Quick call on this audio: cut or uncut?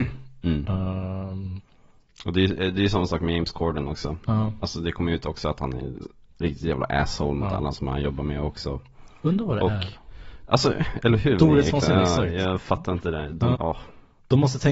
cut